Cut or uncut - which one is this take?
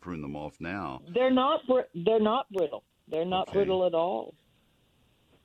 uncut